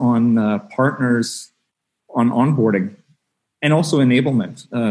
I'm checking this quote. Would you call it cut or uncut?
uncut